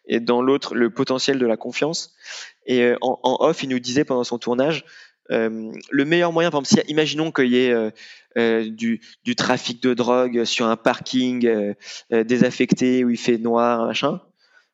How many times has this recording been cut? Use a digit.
0